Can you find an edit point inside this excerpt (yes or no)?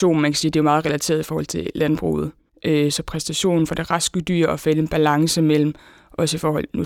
no